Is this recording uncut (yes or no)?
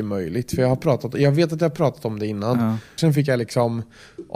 no